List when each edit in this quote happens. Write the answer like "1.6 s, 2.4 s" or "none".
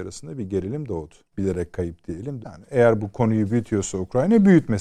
1.3 s, 2.4 s